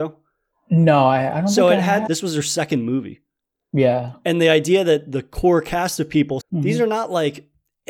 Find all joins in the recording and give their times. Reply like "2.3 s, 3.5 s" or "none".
2.1 s, 6.4 s